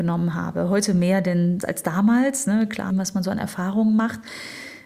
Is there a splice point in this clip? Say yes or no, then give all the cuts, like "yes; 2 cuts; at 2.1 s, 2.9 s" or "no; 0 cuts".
yes; 2 cuts; at 1.6 s, 2.9 s